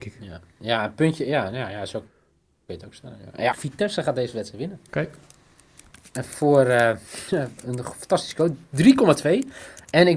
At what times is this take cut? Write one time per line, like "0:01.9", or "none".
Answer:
0:03.5
0:04.9